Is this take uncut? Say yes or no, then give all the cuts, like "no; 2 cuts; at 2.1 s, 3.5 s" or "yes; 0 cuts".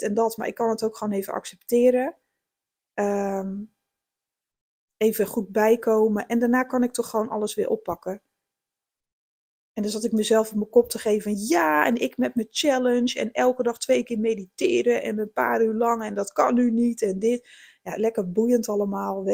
yes; 0 cuts